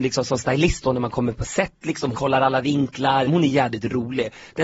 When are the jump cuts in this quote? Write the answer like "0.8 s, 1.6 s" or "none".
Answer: 2.1 s, 3.3 s